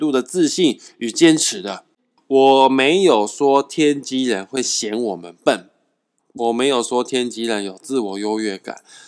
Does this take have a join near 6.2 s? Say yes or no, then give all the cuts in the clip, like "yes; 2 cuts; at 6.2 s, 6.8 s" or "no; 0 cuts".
yes; 2 cuts; at 2.2 s, 6.2 s